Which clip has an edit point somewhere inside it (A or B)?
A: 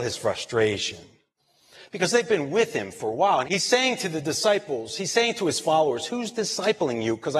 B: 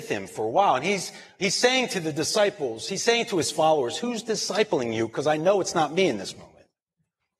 A